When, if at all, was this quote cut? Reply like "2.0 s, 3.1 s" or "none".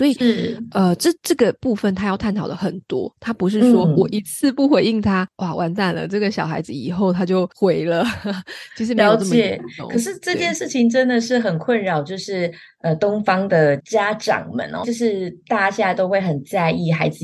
13.8 s, 14.8 s